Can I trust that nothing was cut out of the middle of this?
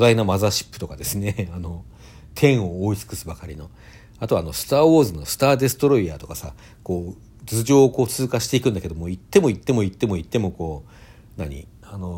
yes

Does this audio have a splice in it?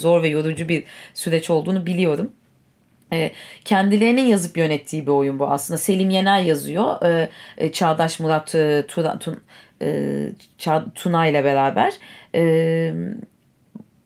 no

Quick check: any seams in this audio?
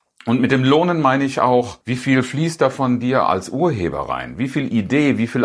yes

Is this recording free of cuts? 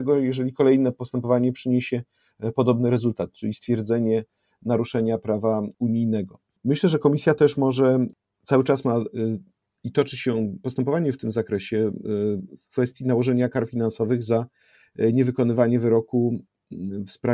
yes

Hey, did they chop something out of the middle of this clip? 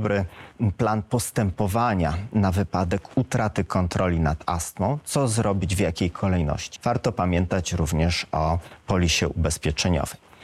yes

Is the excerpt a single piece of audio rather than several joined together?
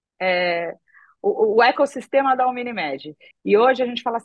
no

